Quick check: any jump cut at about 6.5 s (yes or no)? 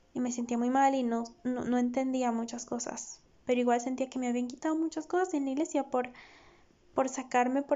no